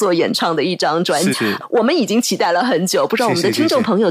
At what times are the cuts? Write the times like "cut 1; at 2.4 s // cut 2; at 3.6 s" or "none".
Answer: cut 1; at 1.3 s